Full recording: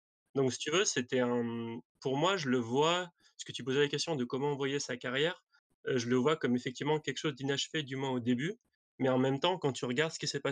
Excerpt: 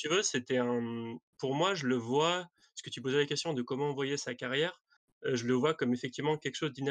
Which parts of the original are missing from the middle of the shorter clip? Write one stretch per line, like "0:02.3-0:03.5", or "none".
none